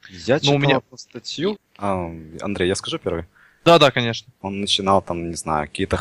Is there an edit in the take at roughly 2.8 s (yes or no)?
no